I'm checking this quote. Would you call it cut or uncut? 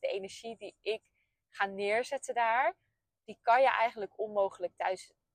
uncut